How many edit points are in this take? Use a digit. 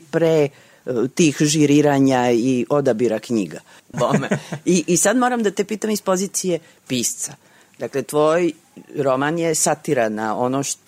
1